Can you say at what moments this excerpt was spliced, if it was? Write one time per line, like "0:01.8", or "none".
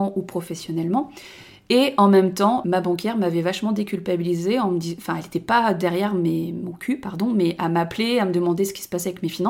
none